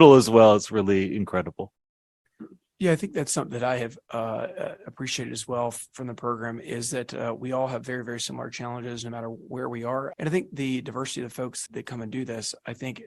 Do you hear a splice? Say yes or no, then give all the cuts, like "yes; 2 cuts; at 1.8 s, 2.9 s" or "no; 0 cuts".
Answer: yes; 2 cuts; at 10.1 s, 11.7 s